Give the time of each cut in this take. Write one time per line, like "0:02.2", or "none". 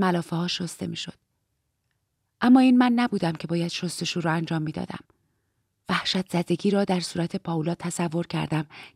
none